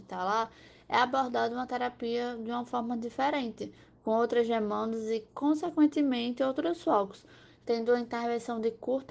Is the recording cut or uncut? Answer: uncut